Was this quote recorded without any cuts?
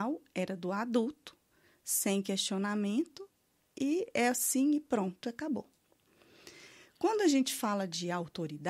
yes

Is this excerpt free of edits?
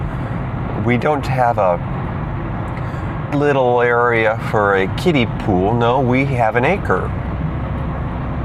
no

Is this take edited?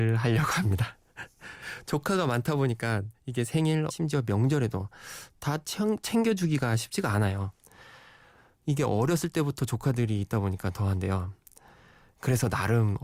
yes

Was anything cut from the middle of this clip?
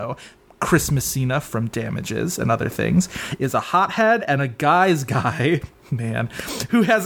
no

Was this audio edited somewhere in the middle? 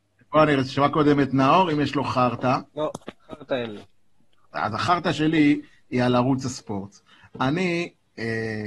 yes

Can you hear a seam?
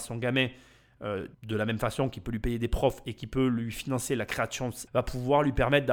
yes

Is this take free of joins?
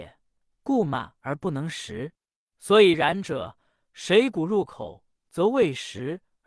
no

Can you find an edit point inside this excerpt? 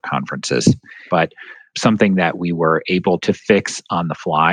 yes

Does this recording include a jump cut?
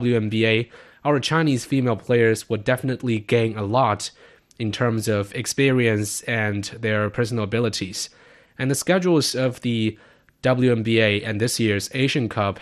no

